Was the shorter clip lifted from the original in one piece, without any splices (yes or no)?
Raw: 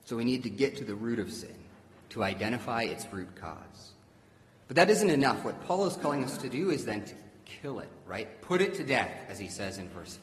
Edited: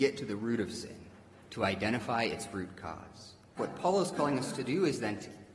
no